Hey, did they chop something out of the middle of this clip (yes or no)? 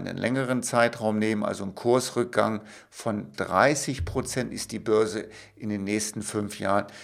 no